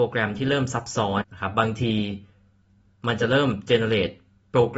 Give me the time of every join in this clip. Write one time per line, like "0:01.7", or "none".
0:01.2